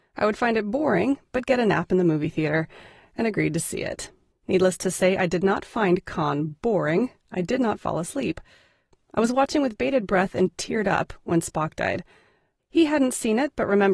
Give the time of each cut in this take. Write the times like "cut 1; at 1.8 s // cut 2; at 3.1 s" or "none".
cut 1; at 4.3 s // cut 2; at 12.6 s